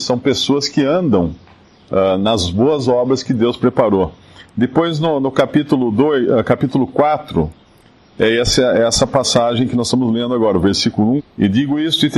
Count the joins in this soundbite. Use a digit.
1